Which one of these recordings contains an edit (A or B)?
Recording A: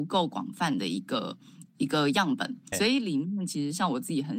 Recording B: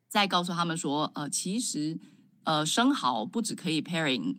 A